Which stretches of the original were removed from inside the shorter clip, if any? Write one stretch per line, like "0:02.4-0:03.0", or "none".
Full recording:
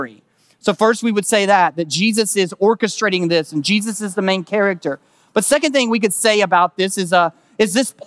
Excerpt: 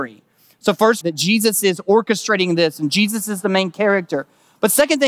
0:01.0-0:01.7